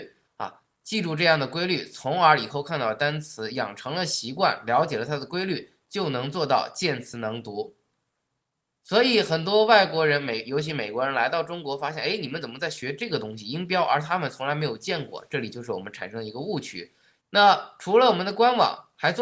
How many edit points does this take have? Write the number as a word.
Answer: one